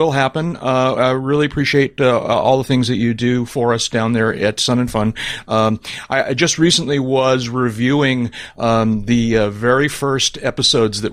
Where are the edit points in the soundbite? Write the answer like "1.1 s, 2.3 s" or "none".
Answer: none